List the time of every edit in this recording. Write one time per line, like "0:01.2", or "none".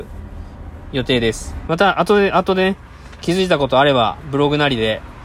0:01.7